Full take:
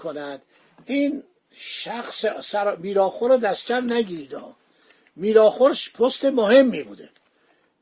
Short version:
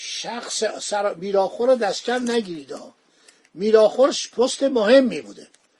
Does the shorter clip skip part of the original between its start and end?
no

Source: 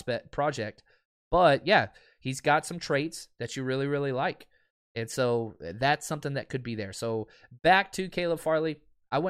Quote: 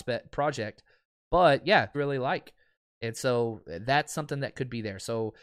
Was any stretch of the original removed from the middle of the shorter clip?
yes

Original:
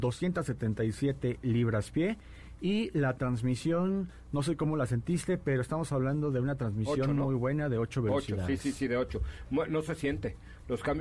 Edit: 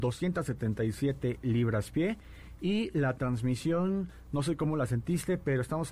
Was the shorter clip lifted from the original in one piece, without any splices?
yes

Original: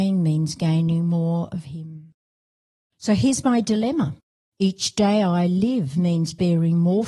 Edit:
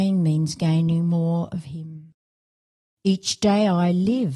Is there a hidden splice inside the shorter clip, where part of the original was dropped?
yes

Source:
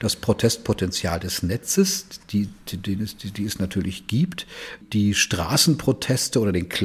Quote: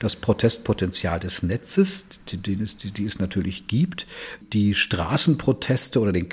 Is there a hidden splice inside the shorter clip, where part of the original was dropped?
yes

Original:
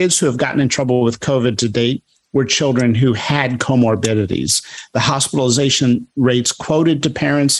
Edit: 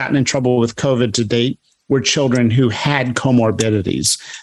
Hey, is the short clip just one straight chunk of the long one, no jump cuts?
yes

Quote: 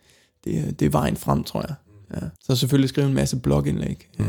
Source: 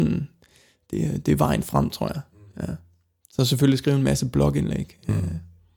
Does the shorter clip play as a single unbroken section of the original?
no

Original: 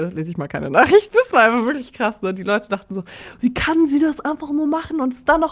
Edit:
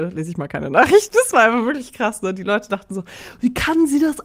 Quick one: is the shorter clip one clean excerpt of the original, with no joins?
yes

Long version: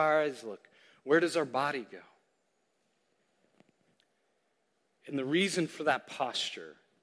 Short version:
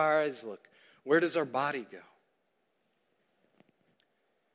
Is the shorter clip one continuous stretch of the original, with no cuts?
yes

